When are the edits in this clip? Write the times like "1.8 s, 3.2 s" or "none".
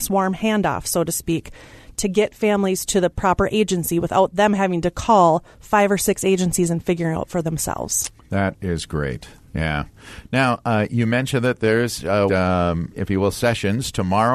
5.5 s, 12.3 s